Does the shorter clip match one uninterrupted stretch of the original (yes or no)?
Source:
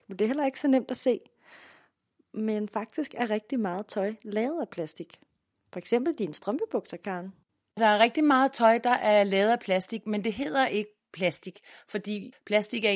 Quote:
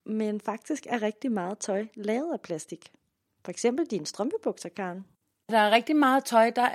yes